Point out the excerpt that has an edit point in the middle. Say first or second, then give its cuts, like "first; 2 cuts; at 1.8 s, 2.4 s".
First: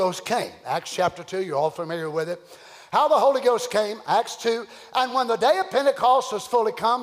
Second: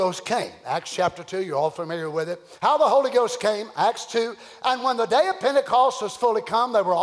second; 1 cut; at 2.6 s